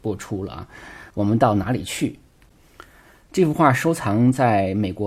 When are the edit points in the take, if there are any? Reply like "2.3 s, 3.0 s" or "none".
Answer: 1.1 s